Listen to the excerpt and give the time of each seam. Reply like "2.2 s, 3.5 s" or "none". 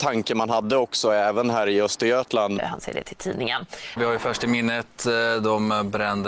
2.6 s, 4.0 s